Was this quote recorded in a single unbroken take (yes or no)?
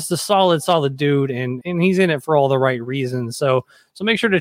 no